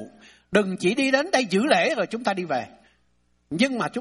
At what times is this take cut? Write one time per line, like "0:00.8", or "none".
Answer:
none